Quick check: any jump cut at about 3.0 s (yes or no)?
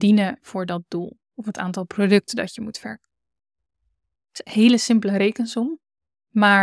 no